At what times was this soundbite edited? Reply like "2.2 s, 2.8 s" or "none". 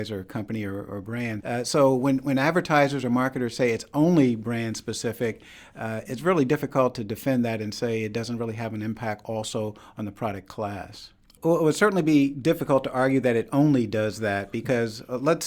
1.4 s, 11.4 s